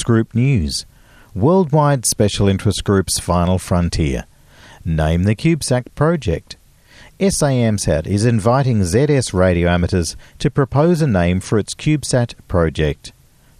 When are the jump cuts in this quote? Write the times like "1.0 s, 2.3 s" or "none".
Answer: none